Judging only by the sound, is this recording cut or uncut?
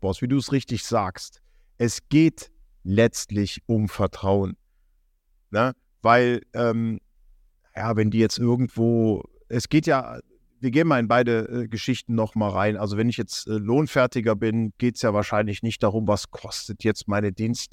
uncut